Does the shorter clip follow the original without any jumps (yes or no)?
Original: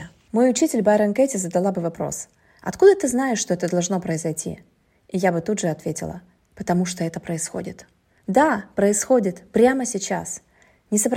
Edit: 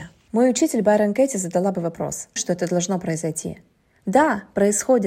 no